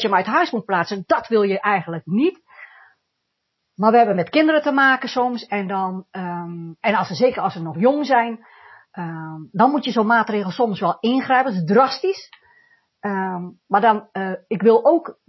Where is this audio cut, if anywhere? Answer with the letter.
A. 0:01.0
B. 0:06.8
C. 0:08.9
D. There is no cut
B